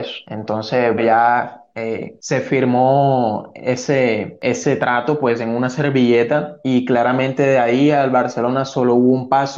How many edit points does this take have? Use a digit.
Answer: 1